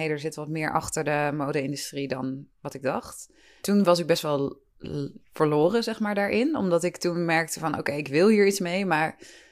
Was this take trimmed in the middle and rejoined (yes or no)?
no